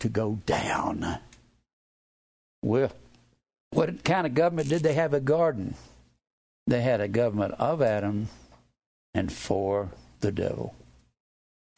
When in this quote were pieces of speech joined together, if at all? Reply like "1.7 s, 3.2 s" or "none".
9.0 s